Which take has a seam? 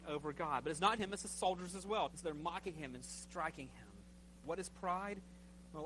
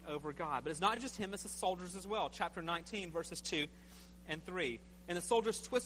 first; 3 cuts; at 1.0 s, 2.1 s, 4.4 s

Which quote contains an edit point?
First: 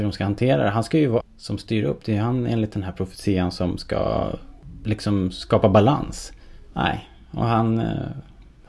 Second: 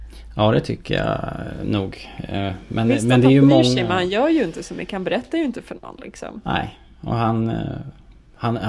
first; 2 cuts; at 1.2 s, 6.7 s

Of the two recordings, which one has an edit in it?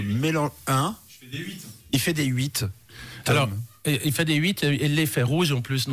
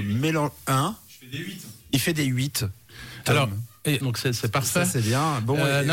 second; 1 cut; at 4.0 s

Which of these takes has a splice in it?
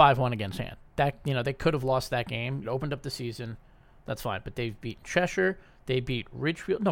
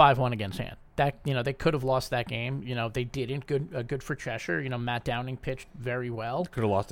first; 1 cut; at 2.6 s

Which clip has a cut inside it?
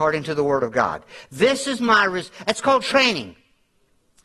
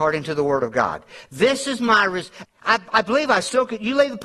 second; 1 cut; at 2.4 s

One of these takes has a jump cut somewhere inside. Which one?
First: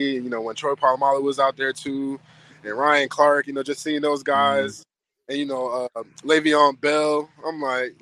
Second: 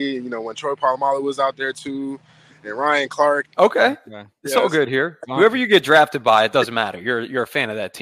second; 1 cut; at 3.4 s

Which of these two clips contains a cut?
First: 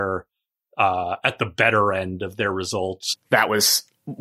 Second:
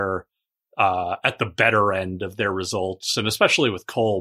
first; 1 cut; at 3.1 s

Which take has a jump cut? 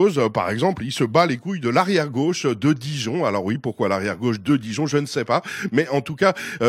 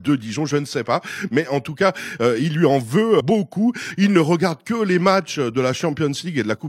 second; 1 cut; at 3.2 s

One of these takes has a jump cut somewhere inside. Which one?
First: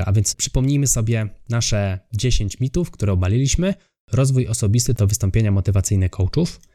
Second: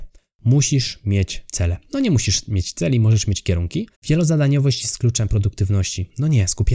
second; 1 cut; at 3.9 s

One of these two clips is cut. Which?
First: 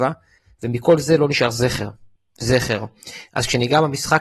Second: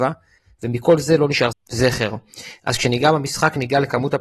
second; 1 cut; at 1.5 s

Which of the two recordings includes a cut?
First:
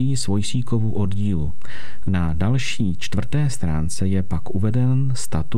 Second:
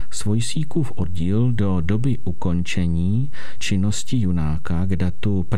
first; 1 cut; at 2.1 s

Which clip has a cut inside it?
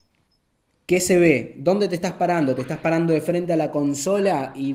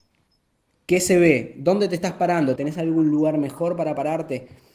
second; 1 cut; at 2.6 s

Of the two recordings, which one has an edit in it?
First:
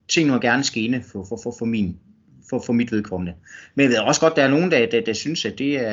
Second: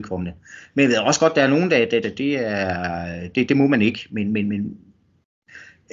second; 1 cut; at 2.0 s

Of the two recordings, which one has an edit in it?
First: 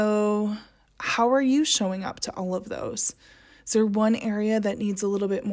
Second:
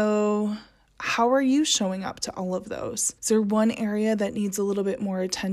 second; 1 cut; at 3.2 s

